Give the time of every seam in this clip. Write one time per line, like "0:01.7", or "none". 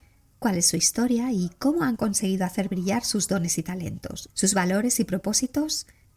0:04.3